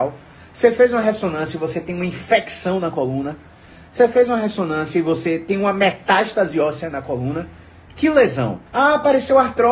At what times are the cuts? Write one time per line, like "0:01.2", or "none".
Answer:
0:08.7